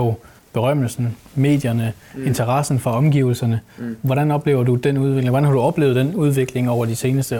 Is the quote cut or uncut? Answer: uncut